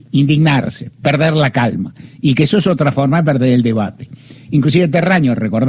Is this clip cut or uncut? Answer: uncut